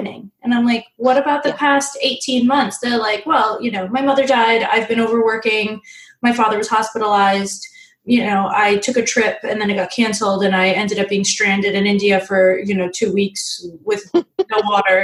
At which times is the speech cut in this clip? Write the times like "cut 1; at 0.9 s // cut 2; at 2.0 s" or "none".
none